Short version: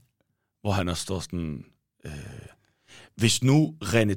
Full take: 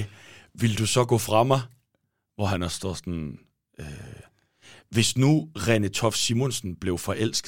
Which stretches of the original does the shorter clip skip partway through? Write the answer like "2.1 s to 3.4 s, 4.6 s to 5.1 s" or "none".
none